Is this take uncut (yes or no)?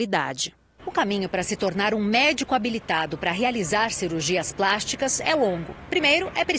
yes